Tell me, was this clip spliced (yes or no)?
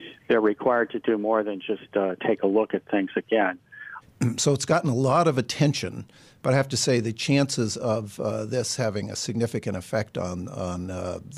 yes